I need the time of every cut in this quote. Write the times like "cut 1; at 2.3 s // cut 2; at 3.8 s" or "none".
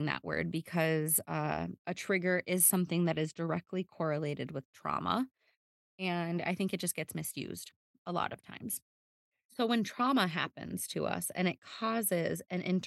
none